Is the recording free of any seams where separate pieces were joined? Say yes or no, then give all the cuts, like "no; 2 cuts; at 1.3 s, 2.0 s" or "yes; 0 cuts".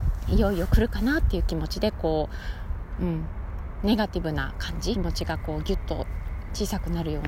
no; 1 cut; at 4.9 s